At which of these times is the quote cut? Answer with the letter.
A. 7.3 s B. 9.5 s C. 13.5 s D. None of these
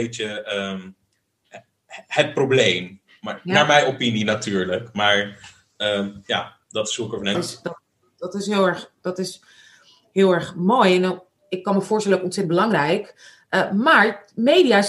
A